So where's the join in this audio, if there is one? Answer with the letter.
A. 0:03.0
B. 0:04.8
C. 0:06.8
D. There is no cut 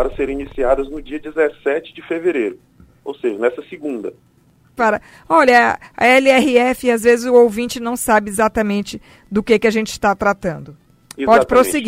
B